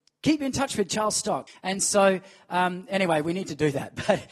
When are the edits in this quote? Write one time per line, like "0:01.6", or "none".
0:01.5